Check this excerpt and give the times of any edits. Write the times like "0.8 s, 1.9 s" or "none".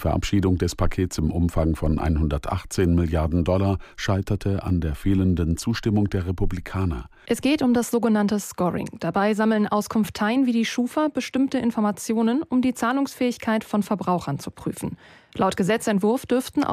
7.3 s